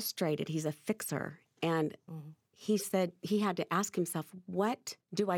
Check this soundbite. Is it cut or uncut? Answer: uncut